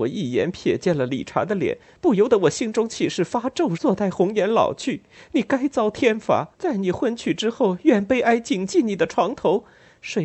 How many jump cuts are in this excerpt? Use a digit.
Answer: 2